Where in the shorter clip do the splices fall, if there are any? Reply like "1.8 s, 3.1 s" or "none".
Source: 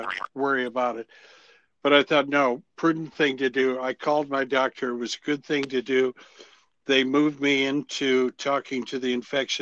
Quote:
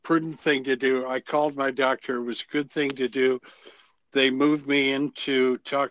none

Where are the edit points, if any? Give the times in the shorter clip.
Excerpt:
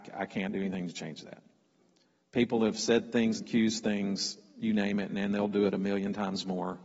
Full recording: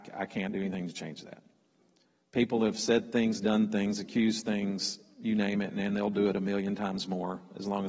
3.4 s

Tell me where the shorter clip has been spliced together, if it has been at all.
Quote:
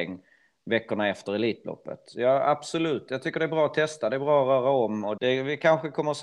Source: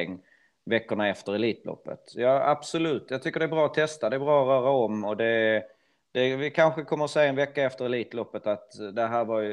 5.2 s

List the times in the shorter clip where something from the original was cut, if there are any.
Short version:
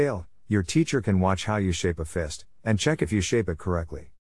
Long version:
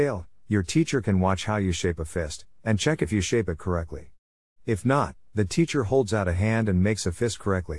none

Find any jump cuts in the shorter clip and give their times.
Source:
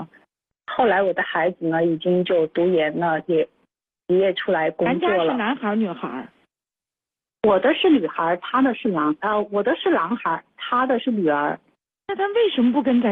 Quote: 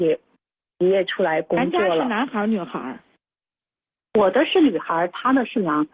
none

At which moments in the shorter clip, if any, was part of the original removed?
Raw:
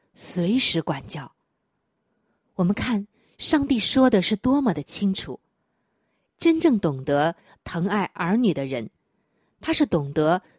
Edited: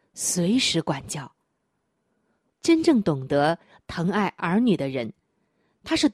2.5 s

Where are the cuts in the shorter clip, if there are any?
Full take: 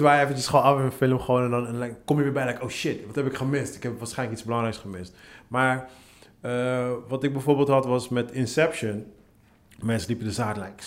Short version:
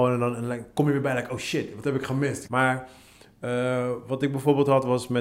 2.5 s

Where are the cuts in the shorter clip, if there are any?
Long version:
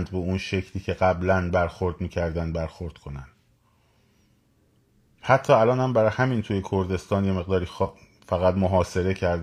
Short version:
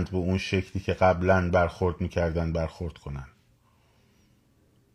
none

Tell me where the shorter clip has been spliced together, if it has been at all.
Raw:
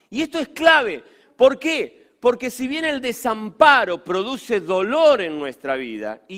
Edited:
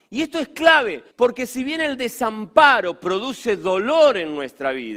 1.1 s

